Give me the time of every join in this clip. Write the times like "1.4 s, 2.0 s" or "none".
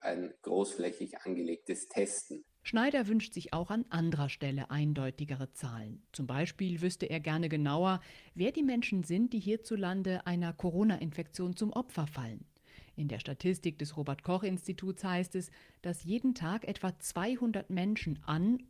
2.6 s